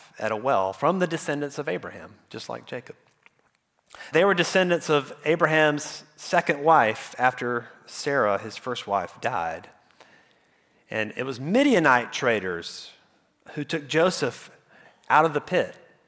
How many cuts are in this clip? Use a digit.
1